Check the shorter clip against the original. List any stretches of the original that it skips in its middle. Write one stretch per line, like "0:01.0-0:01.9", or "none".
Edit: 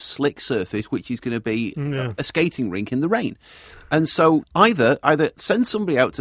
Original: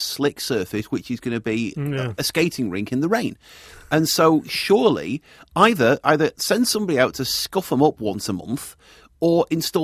0:04.4-0:05.4